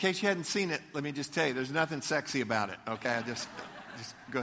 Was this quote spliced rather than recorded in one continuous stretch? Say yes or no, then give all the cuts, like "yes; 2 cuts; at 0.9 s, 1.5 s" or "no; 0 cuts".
no; 0 cuts